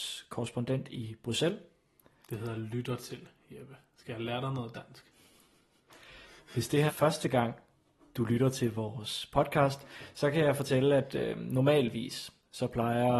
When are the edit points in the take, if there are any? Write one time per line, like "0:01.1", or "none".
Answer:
0:02.2
0:06.9